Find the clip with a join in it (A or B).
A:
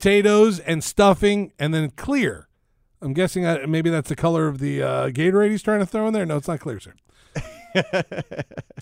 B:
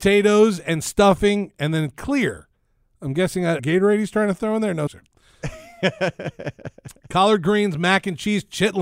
B